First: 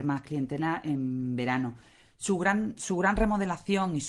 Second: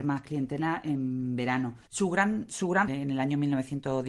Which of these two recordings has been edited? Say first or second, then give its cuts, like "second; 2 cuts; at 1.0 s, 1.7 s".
second; 2 cuts; at 1.9 s, 2.9 s